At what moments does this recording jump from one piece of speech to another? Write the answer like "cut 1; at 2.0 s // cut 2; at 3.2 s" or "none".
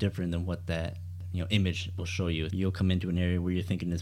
cut 1; at 2.5 s